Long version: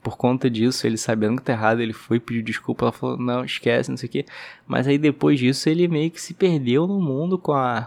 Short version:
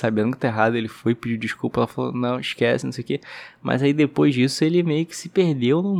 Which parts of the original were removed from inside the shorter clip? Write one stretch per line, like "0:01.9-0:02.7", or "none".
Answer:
none